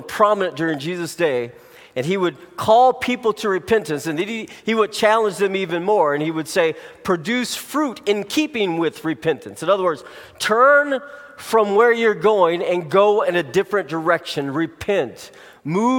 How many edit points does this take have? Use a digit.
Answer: 0